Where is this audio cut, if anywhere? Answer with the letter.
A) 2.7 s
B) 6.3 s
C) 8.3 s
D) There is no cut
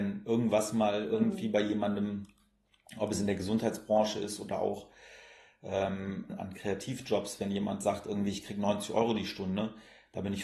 B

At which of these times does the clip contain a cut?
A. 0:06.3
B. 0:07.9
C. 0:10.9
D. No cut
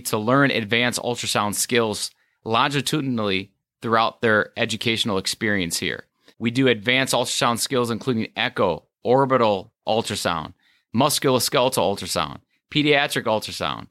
A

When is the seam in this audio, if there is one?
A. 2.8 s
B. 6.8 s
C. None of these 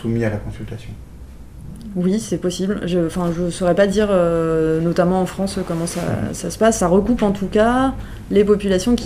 C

